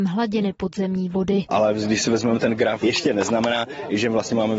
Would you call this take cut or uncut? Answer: cut